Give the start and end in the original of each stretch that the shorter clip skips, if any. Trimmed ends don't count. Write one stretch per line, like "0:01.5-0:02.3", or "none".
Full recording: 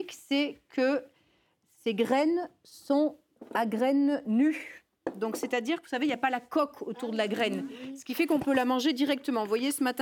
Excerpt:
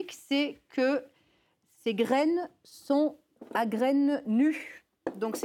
none